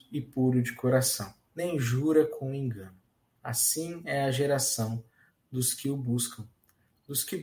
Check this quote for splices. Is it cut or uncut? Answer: cut